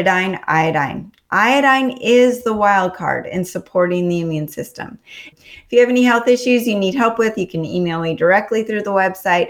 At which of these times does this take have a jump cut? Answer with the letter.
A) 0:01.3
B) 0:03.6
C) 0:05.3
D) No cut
C